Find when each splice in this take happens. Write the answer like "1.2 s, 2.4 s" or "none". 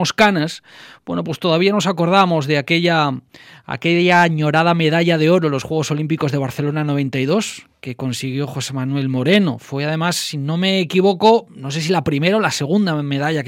none